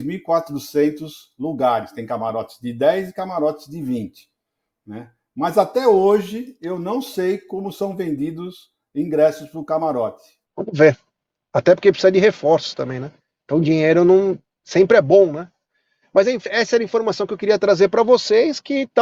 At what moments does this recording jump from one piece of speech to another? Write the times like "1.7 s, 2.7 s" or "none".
10.5 s, 16.5 s